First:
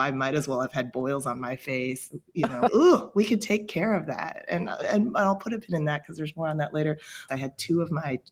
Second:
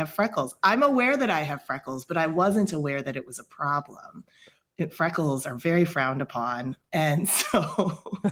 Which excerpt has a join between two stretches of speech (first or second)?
first